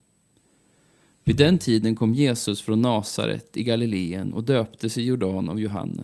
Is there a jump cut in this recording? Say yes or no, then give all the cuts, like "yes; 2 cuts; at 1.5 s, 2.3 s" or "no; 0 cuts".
no; 0 cuts